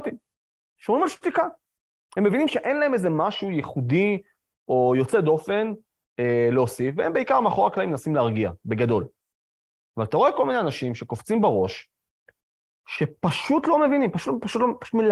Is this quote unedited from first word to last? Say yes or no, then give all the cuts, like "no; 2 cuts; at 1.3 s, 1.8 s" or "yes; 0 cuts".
yes; 0 cuts